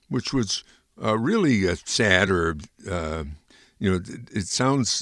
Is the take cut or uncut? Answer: uncut